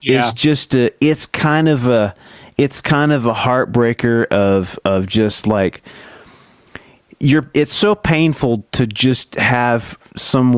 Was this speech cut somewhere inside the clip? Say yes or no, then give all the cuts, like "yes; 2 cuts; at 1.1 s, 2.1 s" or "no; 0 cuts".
no; 0 cuts